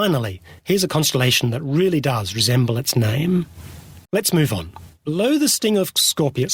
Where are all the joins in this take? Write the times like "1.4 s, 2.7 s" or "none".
4.0 s